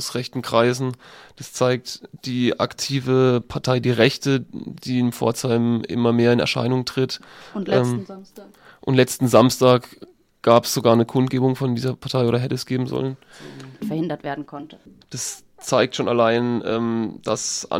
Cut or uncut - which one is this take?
cut